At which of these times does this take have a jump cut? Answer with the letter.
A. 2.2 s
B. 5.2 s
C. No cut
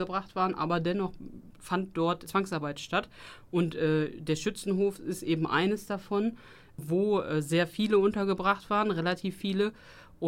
A